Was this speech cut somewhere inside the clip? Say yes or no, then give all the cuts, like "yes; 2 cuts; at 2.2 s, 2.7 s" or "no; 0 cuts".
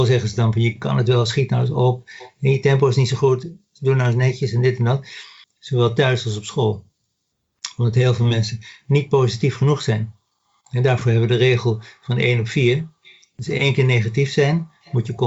yes; 1 cut; at 5.4 s